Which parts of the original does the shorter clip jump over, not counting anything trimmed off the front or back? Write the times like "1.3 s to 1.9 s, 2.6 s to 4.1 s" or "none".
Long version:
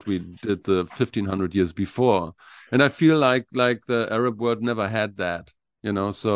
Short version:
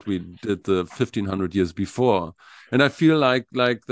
none